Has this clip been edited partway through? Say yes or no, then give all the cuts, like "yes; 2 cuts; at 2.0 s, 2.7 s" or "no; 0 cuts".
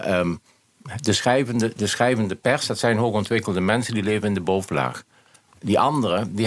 no; 0 cuts